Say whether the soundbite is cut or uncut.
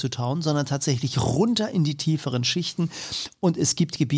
uncut